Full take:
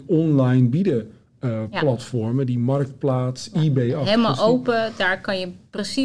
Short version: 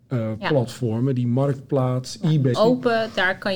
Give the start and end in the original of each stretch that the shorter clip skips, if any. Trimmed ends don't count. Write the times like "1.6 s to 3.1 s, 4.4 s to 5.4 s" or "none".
3.9 s to 4.4 s